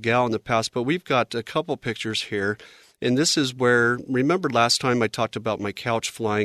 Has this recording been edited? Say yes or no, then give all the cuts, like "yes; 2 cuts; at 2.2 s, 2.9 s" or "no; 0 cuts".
no; 0 cuts